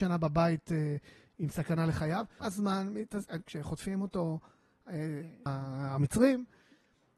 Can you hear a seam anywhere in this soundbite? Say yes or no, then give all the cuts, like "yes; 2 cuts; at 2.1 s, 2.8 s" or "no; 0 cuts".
yes; 3 cuts; at 2.4 s, 3.4 s, 5.5 s